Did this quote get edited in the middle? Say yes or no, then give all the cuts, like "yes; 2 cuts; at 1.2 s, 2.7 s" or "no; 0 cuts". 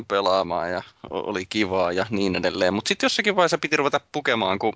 no; 0 cuts